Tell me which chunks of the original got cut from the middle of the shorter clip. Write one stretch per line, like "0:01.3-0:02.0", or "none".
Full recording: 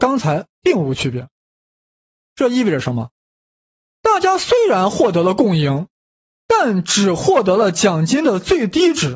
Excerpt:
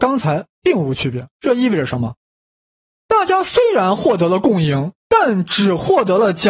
0:01.3-0:02.3
0:05.9-0:06.4